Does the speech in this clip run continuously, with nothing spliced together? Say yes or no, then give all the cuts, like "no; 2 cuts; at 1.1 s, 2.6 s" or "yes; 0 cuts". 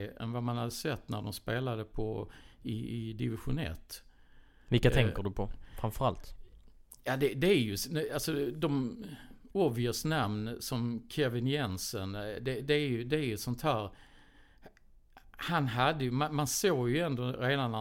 yes; 0 cuts